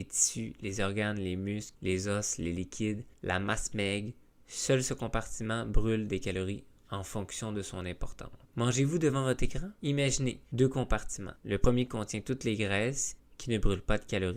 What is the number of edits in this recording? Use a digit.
1